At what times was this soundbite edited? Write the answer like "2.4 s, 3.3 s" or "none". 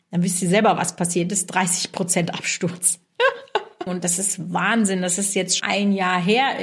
3.9 s, 5.6 s